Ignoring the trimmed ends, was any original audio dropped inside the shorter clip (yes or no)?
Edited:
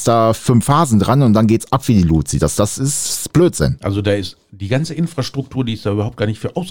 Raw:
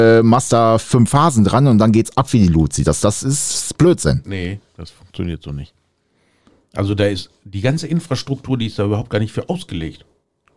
yes